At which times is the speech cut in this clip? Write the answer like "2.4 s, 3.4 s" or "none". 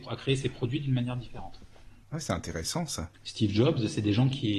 2.0 s, 3.1 s